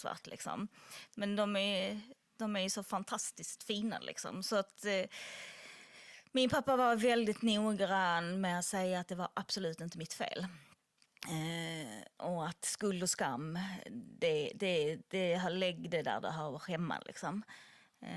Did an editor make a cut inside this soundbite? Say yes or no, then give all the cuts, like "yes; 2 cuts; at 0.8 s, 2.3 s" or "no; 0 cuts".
no; 0 cuts